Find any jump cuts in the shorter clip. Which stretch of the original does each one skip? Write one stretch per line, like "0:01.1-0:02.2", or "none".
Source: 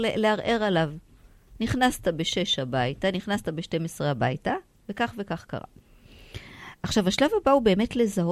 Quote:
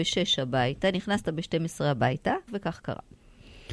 0:04.7-0:05.1